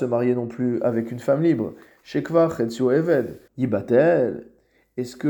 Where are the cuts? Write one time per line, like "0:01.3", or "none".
0:03.5